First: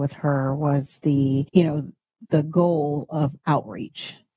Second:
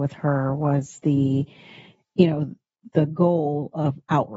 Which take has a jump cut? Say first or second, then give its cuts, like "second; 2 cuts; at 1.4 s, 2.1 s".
first; 1 cut; at 1.5 s